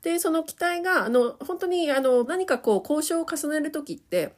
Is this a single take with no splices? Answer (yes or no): no